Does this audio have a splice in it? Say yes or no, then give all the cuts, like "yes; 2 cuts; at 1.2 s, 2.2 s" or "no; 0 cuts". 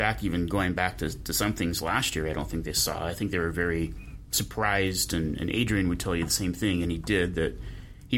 no; 0 cuts